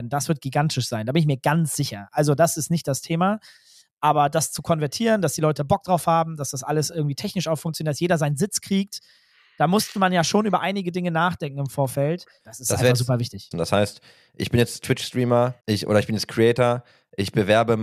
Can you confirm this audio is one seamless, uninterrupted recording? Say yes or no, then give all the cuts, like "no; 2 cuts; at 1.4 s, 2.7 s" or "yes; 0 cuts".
no; 3 cuts; at 12.4 s, 13.5 s, 15.6 s